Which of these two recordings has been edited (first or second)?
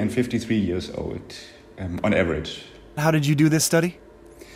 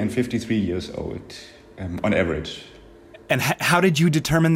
first